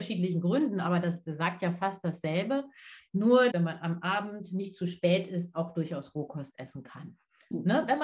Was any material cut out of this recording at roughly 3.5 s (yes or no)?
yes